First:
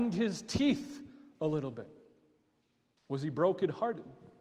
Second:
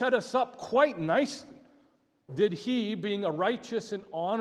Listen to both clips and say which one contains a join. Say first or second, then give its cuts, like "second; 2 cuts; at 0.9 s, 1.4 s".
second; 1 cut; at 2.3 s